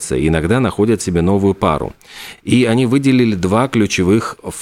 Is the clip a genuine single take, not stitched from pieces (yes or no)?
yes